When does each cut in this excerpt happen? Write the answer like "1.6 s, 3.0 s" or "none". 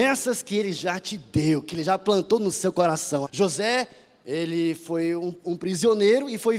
3.2 s